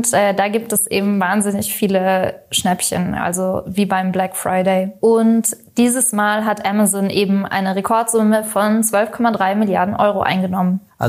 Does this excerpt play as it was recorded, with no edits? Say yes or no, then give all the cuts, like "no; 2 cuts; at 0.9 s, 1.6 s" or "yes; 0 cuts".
yes; 0 cuts